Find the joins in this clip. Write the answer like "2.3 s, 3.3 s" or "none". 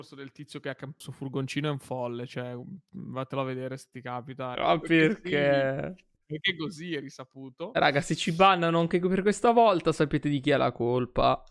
1.0 s, 4.6 s